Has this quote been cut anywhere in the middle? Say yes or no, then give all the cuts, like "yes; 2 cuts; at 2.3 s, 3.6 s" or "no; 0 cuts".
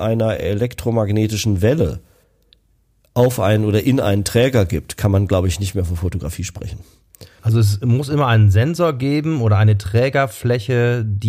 yes; 1 cut; at 7.4 s